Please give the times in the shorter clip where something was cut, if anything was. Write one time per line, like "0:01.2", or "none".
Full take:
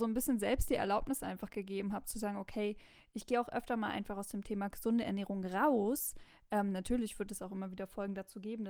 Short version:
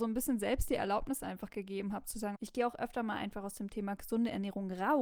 0:02.3